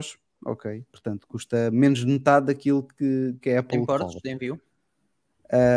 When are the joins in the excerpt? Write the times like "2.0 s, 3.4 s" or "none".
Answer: none